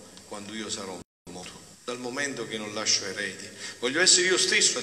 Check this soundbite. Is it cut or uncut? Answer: cut